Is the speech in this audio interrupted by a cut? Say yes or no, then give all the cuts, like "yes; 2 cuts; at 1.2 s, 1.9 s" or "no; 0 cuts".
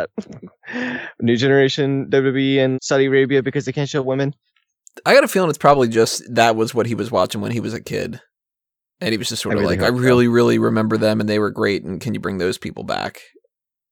yes; 1 cut; at 2.7 s